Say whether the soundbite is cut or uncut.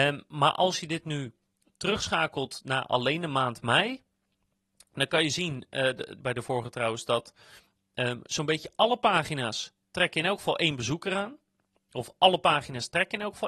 cut